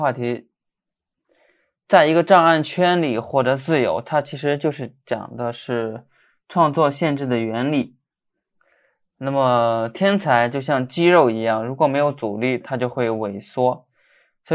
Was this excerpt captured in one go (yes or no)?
yes